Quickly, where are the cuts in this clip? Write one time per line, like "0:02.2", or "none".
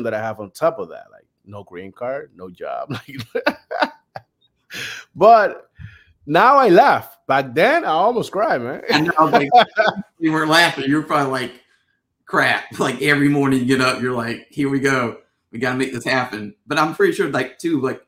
none